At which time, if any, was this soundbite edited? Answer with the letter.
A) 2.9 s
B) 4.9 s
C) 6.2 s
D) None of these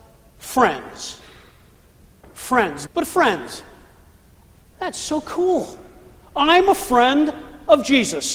A